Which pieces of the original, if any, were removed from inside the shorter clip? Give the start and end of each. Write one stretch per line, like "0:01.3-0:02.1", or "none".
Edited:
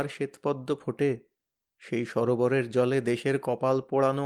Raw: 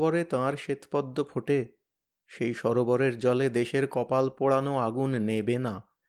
none